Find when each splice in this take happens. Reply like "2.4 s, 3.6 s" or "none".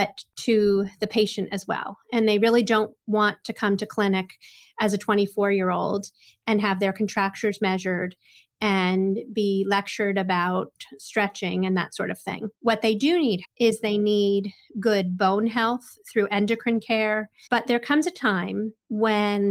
13.4 s, 17.5 s